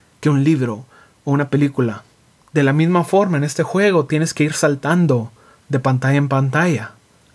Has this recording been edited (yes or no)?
yes